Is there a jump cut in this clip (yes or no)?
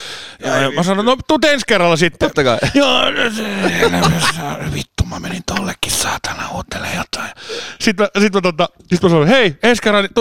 no